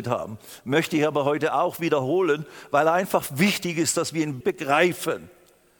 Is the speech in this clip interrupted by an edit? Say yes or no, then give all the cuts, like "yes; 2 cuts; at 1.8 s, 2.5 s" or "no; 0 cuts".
yes; 1 cut; at 4.4 s